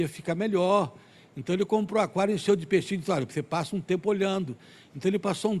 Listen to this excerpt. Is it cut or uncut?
uncut